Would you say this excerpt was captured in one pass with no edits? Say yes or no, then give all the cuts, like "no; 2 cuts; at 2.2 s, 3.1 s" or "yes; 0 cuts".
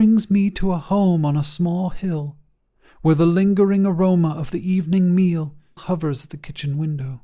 no; 1 cut; at 5.8 s